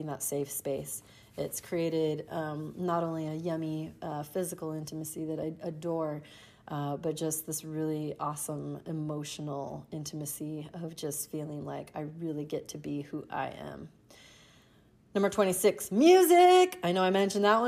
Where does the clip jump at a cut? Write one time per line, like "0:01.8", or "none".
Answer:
none